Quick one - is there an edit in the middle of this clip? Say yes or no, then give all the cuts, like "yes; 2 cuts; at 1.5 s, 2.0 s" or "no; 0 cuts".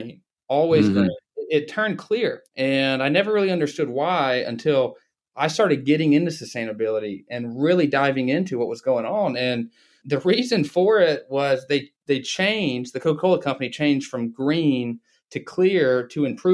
yes; 1 cut; at 2.5 s